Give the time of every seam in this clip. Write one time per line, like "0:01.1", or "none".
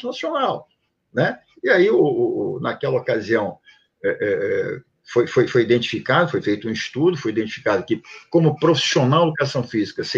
none